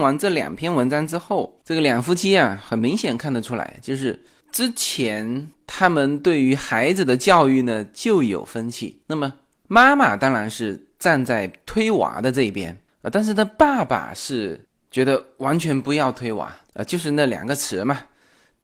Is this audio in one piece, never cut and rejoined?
yes; 0 cuts

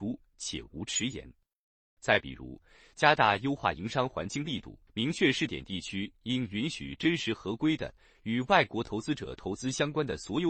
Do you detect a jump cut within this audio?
yes; 2 cuts; at 2.0 s, 4.9 s

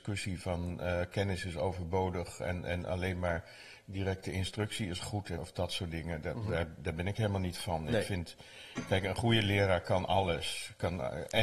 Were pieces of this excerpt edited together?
yes; 1 cut; at 5.4 s

